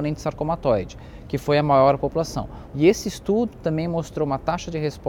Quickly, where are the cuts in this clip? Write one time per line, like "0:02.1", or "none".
0:02.7